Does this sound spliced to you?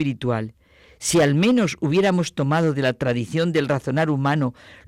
no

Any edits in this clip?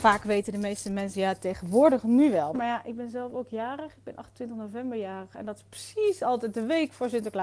yes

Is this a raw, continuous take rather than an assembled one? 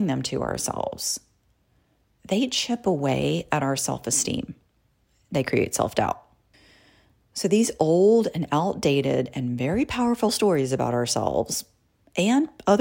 yes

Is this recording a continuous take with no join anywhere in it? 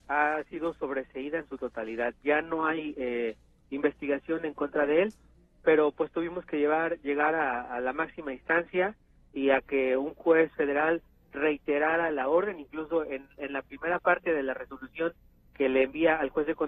yes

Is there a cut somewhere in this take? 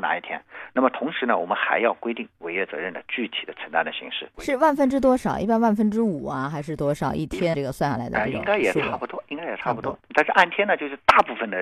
yes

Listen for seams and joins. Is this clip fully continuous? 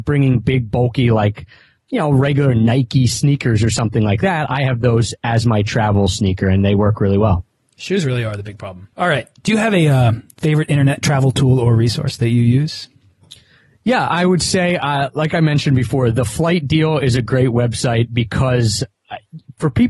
no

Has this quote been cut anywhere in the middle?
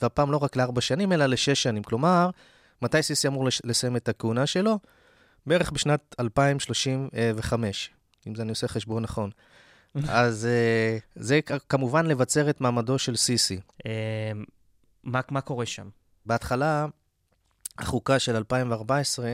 yes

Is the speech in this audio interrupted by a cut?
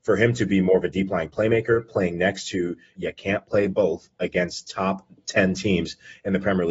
yes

